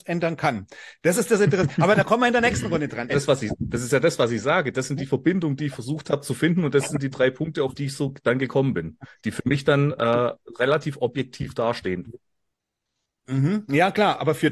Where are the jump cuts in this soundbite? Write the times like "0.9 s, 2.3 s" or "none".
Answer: 3.1 s